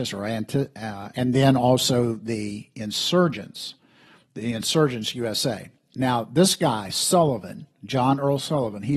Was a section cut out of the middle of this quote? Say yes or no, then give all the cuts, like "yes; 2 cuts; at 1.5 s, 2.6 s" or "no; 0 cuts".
yes; 1 cut; at 1.1 s